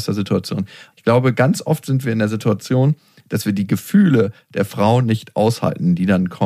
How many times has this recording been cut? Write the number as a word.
one